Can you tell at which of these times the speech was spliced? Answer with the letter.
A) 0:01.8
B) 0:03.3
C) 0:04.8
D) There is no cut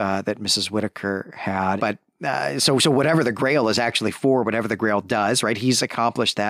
A